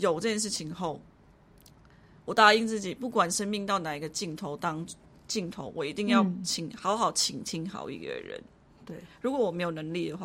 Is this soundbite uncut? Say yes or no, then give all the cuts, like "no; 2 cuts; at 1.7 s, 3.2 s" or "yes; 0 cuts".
yes; 0 cuts